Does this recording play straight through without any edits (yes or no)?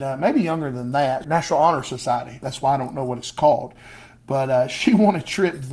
no